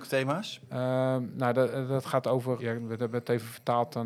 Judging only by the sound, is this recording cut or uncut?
cut